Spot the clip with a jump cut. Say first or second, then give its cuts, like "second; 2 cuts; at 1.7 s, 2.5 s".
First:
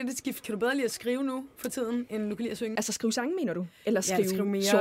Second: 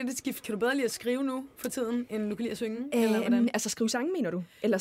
first; 1 cut; at 2.8 s